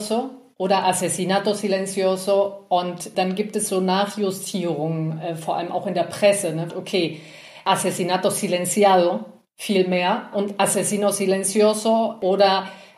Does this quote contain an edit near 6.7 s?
yes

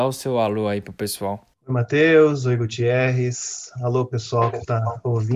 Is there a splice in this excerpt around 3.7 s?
no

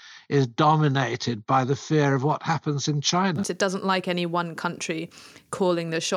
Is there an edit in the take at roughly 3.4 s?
yes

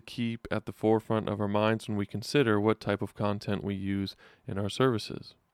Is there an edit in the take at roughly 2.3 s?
no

